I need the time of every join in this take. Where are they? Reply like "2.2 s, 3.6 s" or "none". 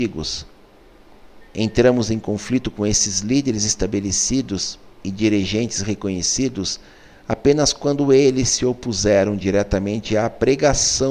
1.4 s